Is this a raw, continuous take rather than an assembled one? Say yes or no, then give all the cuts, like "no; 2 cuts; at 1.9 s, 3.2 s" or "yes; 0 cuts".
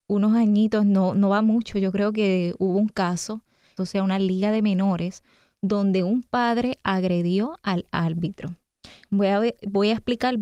no; 2 cuts; at 3.8 s, 9.0 s